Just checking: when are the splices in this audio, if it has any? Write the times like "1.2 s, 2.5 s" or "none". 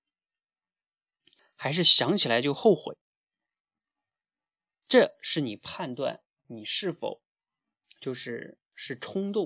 1.4 s

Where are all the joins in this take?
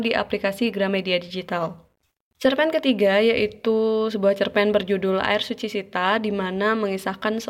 2.3 s

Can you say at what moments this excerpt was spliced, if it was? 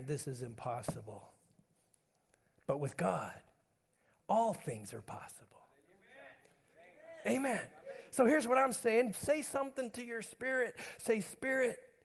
9.1 s

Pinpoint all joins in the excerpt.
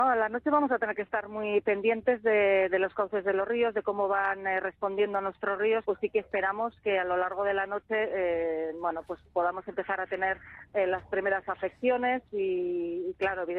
5.8 s

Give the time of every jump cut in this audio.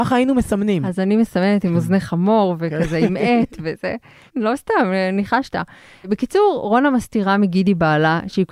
4.3 s

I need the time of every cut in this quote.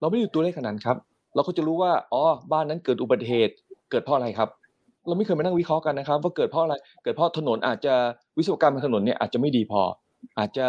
none

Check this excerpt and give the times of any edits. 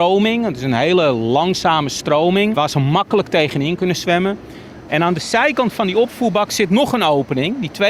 2.5 s, 4.9 s

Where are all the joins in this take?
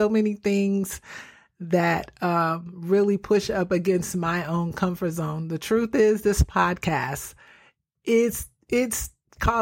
none

